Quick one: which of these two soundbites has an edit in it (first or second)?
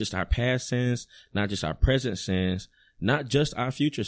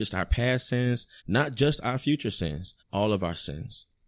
second